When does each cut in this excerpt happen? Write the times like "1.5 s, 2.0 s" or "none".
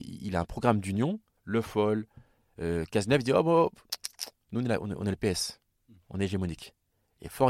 1.4 s